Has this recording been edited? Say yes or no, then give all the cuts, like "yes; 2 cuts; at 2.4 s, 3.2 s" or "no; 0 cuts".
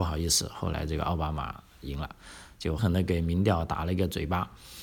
yes; 1 cut; at 2.8 s